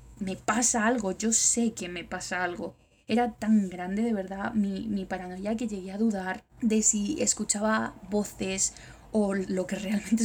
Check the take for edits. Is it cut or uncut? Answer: uncut